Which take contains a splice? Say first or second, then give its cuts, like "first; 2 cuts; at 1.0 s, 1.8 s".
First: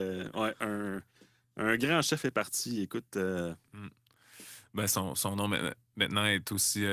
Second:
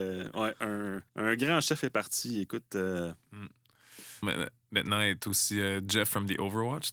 second; 2 cuts; at 1.1 s, 4.2 s